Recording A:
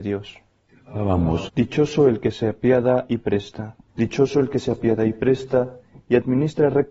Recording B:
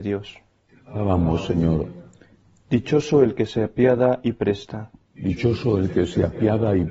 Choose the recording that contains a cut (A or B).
A